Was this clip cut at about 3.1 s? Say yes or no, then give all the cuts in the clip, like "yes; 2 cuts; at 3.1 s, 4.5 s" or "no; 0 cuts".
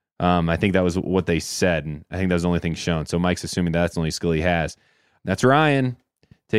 no; 1 cut; at 5.2 s